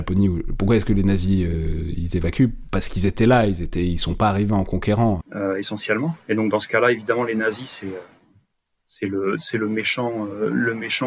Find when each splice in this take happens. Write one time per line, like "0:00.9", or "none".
0:05.2